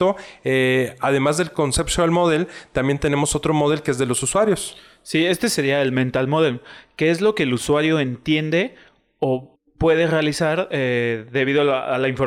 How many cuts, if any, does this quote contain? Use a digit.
1